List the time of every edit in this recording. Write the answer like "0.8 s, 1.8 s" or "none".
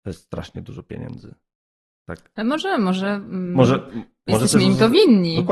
none